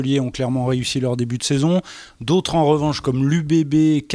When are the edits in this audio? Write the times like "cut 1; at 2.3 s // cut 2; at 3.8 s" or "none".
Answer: none